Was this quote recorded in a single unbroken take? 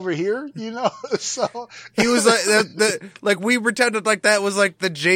yes; 0 cuts

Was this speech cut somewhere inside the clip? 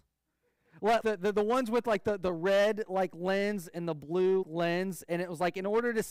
yes; 2 cuts; at 1.0 s, 4.4 s

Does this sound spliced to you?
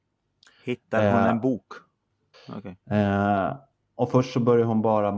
yes; 1 cut; at 2.3 s

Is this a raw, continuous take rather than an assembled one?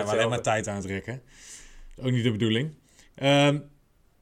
yes; 0 cuts

